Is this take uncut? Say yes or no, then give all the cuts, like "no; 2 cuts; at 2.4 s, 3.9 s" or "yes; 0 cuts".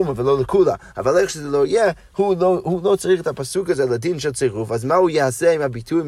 yes; 0 cuts